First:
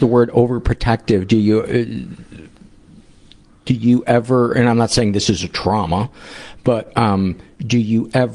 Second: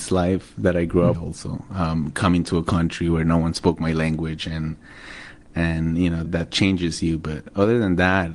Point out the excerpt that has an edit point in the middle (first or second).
second